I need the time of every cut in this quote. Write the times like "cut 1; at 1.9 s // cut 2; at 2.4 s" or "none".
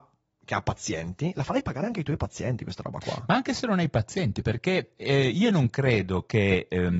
none